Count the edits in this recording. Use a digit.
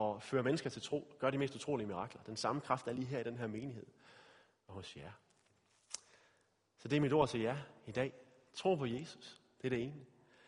0